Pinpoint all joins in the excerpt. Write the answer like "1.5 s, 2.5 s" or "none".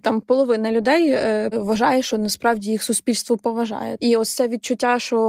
1.5 s, 4.0 s